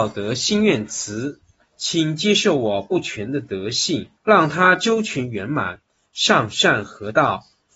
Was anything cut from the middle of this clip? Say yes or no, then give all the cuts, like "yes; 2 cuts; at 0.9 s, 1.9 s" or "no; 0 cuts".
yes; 2 cuts; at 1.6 s, 4.2 s